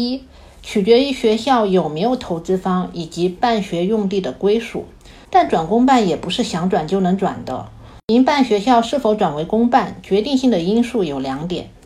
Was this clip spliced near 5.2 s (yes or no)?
yes